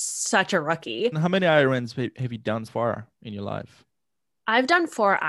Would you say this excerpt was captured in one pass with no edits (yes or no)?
no